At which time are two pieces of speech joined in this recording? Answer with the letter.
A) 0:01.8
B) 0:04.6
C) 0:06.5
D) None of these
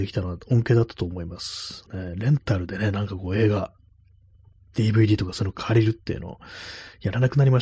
A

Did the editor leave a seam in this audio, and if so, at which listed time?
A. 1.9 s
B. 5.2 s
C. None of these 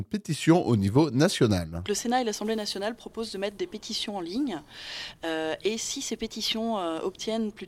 C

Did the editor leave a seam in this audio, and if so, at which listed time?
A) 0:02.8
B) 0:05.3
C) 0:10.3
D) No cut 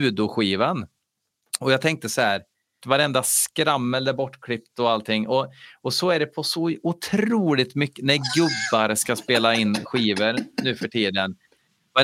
A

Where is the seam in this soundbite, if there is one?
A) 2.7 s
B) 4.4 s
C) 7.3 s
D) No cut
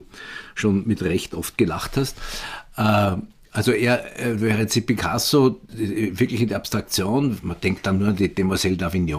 D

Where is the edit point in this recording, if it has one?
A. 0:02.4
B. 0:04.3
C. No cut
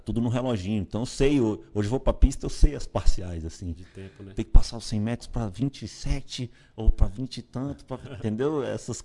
C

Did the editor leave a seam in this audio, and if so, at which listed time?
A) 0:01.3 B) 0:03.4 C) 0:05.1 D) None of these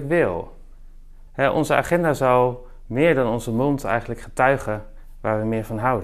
A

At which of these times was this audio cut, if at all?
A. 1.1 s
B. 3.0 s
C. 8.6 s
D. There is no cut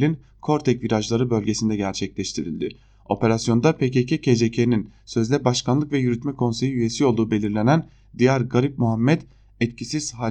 D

